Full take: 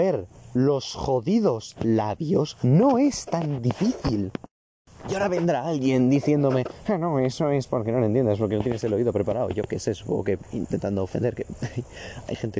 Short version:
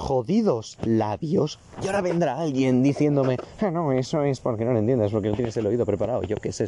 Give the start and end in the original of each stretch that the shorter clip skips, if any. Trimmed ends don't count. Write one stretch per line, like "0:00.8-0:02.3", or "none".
0:02.6-0:04.9